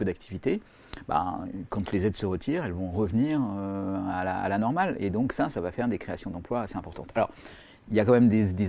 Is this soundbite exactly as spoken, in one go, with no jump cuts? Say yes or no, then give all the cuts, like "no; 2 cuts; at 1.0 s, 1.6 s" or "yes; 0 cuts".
yes; 0 cuts